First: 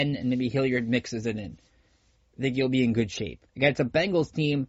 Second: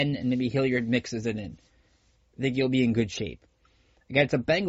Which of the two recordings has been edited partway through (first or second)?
first